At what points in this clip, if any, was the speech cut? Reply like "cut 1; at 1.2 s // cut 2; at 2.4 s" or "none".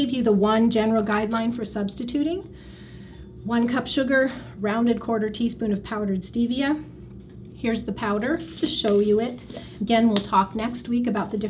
none